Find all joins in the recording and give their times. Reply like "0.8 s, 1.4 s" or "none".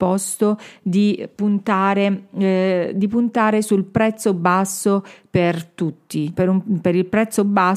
6.3 s